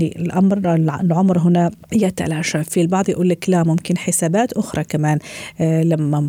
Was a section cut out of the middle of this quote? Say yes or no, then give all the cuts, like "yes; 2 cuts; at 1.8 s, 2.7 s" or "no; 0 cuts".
yes; 1 cut; at 1.8 s